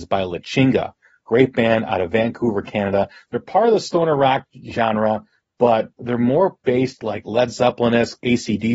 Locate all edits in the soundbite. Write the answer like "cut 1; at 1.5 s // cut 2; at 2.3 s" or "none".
none

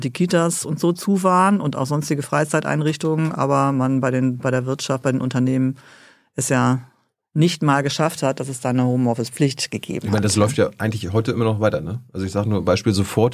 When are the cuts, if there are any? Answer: none

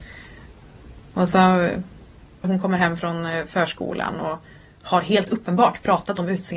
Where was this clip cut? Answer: cut 1; at 2.4 s

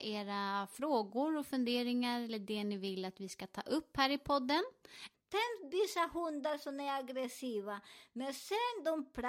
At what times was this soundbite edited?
cut 1; at 5.1 s

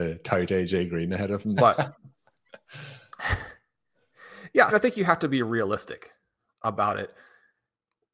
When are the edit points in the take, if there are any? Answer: cut 1; at 1.6 s // cut 2; at 4.7 s

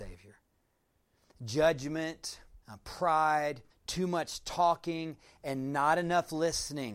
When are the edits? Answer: cut 1; at 2.6 s // cut 2; at 3.7 s

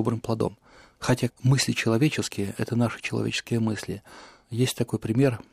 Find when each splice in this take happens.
cut 1; at 1.3 s

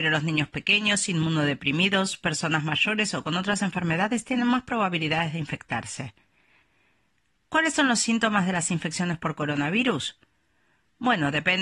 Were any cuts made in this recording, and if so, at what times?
none

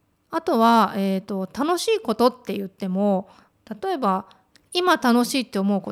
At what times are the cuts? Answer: none

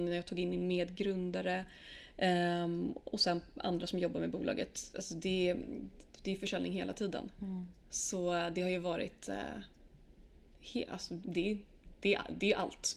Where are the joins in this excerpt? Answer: cut 1; at 11.2 s

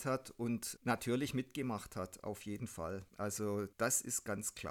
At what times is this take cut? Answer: none

